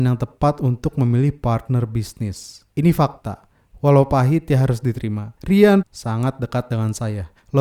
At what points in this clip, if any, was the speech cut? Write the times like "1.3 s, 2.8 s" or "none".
5.8 s